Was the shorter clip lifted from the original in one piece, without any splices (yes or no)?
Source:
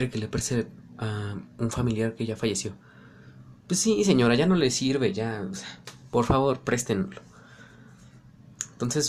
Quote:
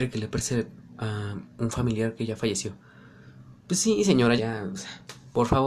no